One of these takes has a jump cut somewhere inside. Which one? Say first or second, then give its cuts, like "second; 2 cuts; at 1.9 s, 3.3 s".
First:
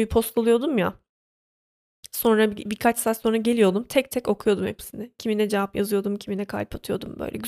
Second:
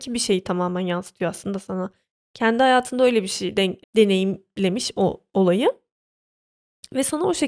second; 1 cut; at 3.8 s